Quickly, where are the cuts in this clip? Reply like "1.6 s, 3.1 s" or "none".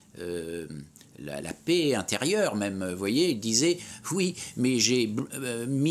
1.4 s